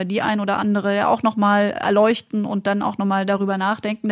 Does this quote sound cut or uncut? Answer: uncut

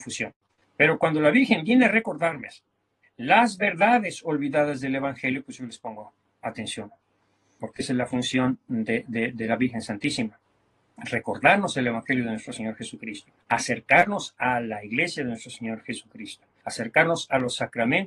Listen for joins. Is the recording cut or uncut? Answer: uncut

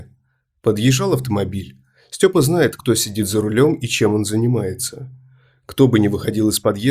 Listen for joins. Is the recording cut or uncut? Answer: uncut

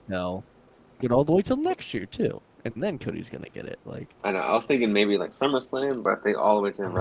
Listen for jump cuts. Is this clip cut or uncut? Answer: cut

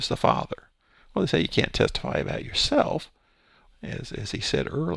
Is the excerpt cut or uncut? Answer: cut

